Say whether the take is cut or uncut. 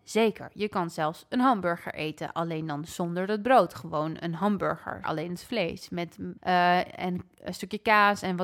cut